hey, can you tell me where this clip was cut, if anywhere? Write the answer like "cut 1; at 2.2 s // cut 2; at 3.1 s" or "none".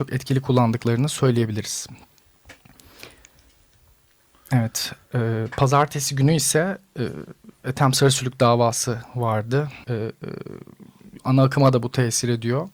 cut 1; at 9.8 s